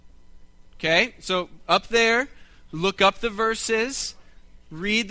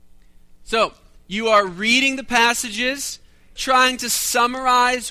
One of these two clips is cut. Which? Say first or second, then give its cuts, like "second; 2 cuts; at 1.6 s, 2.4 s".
second; 1 cut; at 3.6 s